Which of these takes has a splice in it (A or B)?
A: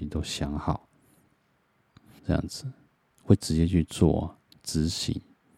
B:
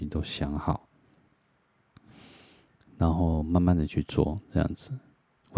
A